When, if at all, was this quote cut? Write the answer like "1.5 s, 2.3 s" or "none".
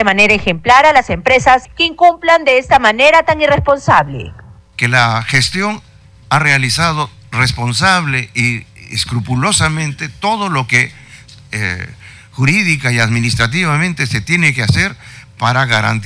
none